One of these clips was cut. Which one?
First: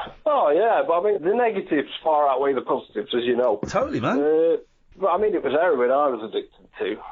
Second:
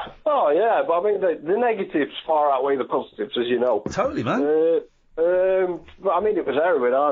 first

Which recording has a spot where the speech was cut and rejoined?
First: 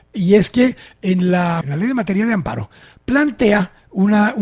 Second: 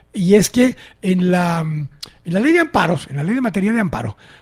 first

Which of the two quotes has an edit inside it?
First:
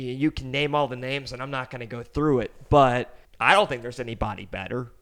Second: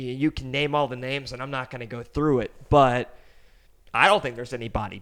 first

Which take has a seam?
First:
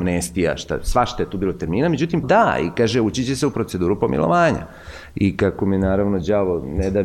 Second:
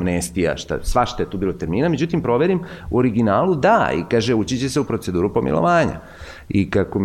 first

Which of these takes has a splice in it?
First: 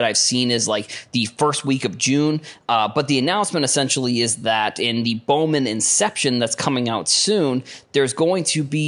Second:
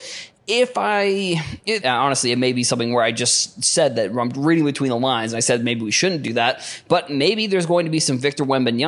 second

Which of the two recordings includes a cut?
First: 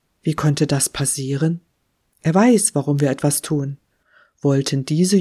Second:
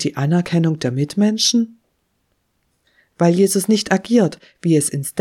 first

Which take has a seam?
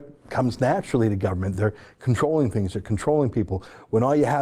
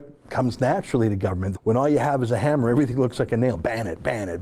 second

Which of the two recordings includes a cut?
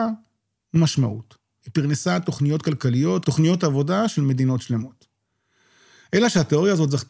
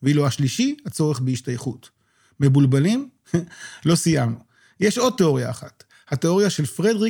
first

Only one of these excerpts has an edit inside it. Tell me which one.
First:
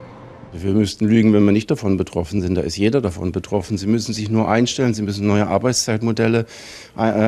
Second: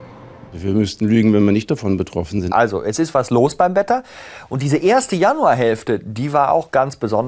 second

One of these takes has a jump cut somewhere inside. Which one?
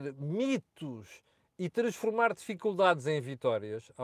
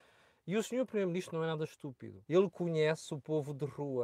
second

